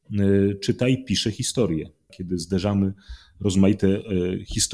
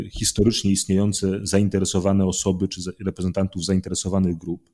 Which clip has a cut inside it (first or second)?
first